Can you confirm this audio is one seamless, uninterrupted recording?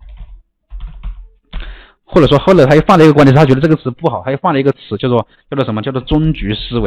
yes; 0 cuts

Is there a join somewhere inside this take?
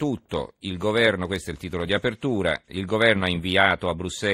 yes; 1 cut; at 2.7 s

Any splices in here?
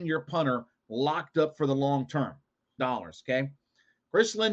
yes; 1 cut; at 2.8 s

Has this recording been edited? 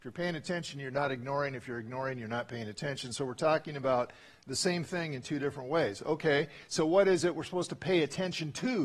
no; 0 cuts

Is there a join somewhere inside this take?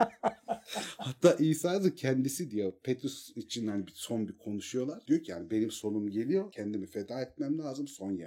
no; 0 cuts

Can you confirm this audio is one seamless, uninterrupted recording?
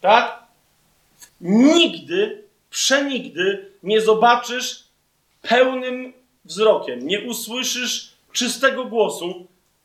no; 1 cut; at 1.3 s

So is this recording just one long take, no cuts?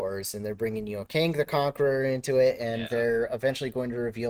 yes; 0 cuts

